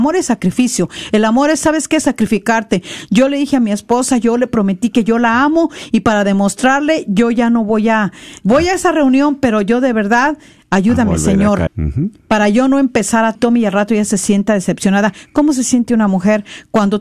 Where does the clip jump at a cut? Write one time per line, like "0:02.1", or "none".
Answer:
0:11.7
0:13.3